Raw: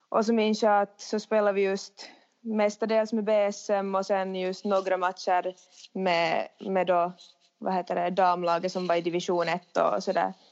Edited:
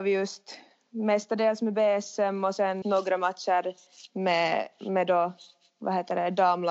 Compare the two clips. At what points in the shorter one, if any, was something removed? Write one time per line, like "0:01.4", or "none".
0:02.8

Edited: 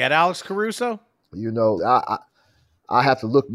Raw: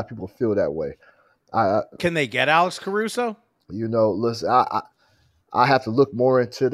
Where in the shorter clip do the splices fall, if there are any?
0:01.8

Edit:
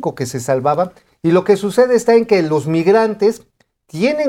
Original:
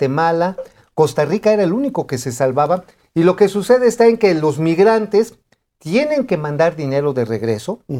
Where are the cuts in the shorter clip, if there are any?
none

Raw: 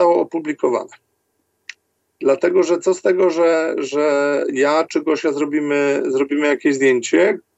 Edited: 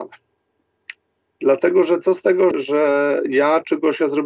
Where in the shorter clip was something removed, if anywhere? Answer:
0:02.5

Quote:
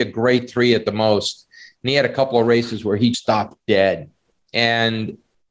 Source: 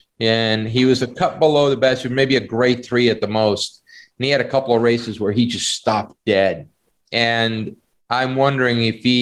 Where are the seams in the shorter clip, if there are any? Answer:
0:03.1

